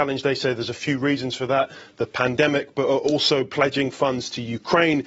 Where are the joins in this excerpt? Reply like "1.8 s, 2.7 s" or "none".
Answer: none

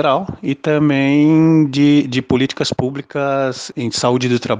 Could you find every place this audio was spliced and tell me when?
none

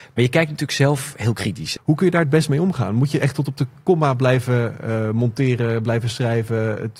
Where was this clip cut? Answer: 1.8 s

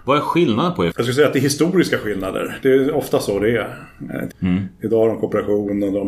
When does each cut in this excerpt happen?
0.9 s, 4.3 s

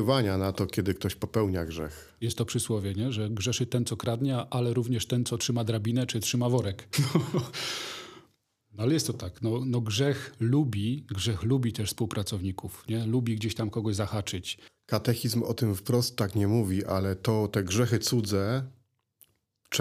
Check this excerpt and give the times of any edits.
6.9 s

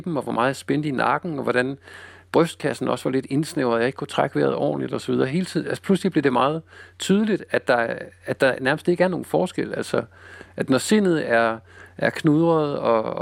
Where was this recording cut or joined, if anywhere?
none

